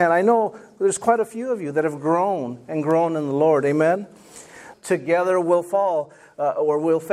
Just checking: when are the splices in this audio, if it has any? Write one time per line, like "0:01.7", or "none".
0:04.7